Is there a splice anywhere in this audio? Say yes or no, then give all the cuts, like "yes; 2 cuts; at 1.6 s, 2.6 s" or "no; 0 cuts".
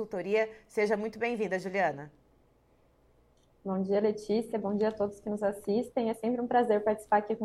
no; 0 cuts